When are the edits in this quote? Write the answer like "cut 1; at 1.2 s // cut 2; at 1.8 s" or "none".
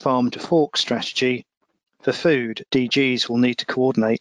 cut 1; at 2.7 s

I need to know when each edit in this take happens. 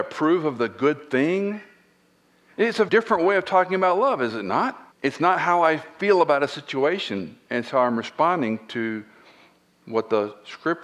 cut 1; at 2.9 s // cut 2; at 4.9 s

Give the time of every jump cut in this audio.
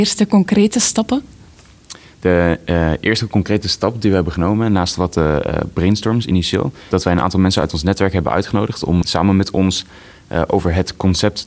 cut 1; at 6.9 s // cut 2; at 9.0 s

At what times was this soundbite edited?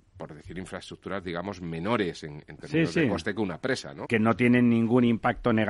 cut 1; at 4.1 s

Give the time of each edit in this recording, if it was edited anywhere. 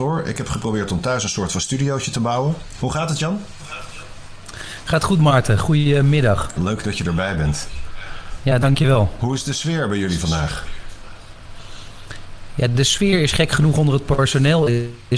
cut 1; at 6.6 s

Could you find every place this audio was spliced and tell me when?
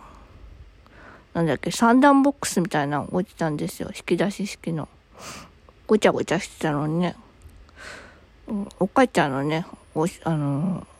cut 1; at 5.8 s // cut 2; at 8.7 s

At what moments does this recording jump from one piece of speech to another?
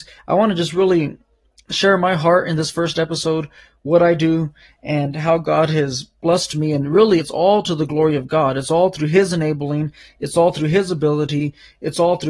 cut 1; at 7.2 s

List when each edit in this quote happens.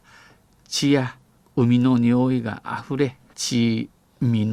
cut 1; at 3.3 s

